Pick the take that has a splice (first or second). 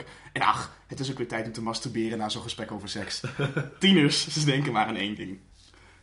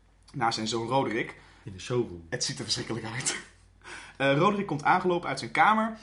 second